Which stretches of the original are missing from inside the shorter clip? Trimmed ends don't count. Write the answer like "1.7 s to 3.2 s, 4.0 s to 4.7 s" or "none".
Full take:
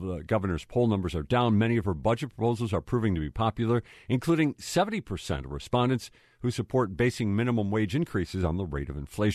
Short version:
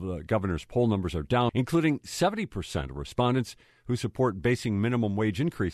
1.5 s to 4.0 s